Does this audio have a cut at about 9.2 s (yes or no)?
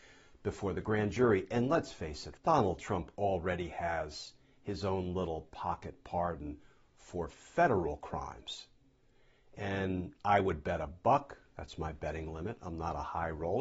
no